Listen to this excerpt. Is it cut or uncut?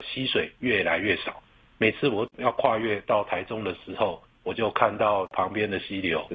uncut